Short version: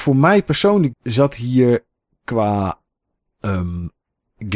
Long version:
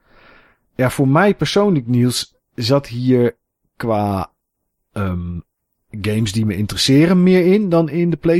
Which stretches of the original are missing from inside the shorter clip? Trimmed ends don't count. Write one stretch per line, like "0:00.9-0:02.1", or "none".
0:01.8-0:02.4